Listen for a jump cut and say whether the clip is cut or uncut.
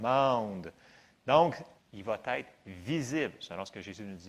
cut